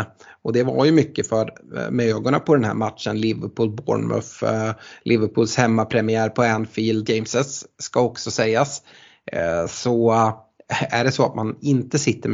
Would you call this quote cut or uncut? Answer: cut